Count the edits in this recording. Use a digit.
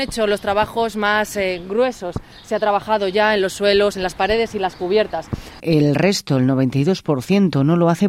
2